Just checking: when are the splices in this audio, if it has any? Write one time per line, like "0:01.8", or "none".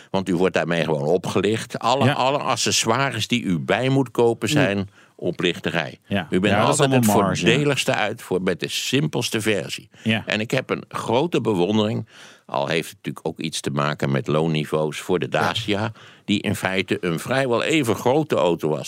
none

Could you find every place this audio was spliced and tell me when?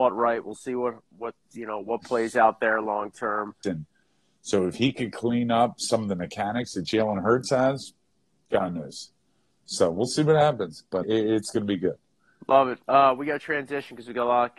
0:03.6
0:11.0
0:12.8

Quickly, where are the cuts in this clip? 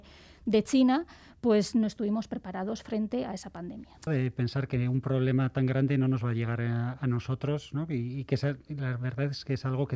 0:04.1

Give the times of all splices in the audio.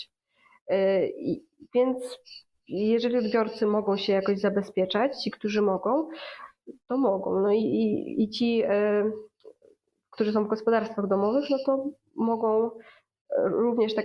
none

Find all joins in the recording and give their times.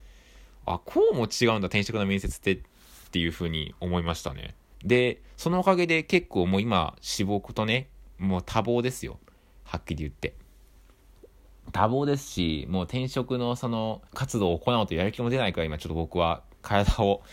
0:04.7
0:14.1

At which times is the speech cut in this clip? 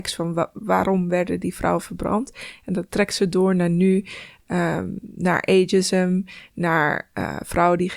none

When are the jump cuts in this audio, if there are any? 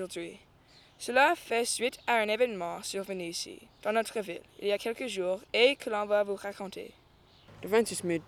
none

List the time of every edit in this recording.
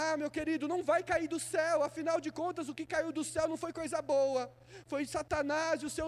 0:04.9

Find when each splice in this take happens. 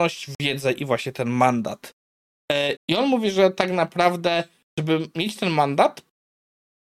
0:02.8

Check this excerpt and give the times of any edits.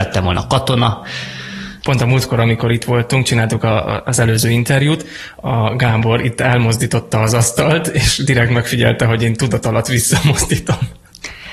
0:01.8

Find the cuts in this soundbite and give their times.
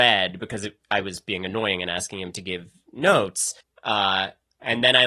0:03.6

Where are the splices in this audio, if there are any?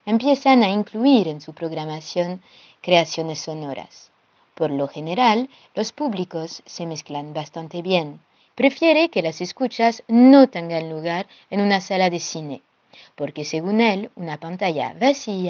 0:08.5

